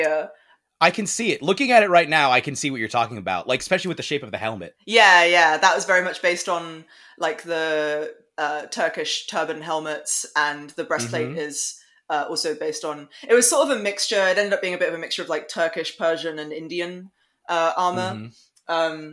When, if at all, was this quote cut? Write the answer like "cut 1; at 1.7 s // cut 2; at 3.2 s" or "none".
none